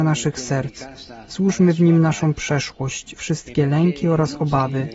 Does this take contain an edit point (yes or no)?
no